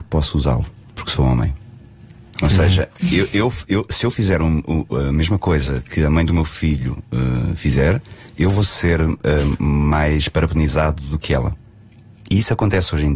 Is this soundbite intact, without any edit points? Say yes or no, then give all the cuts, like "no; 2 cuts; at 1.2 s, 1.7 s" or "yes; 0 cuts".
yes; 0 cuts